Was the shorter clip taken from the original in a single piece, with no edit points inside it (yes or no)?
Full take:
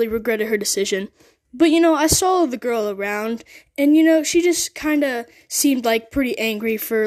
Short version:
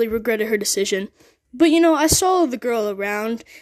yes